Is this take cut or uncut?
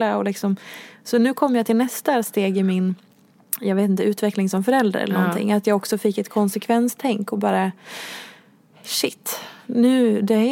uncut